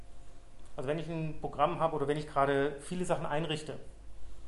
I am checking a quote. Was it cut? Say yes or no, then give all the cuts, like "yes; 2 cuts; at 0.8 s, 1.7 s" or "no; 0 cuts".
no; 0 cuts